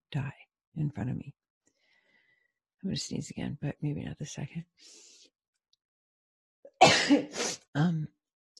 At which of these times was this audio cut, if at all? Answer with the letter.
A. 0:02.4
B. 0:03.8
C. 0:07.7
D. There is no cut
C